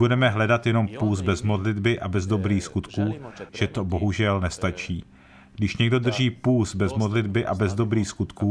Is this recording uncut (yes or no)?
no